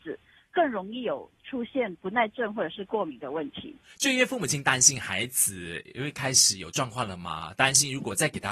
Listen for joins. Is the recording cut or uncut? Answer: uncut